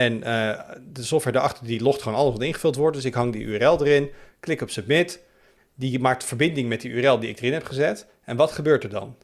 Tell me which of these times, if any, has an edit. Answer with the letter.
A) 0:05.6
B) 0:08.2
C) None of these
A